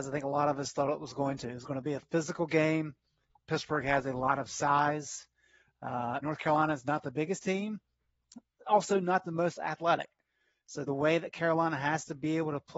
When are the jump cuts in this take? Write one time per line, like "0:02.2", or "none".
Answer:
0:06.2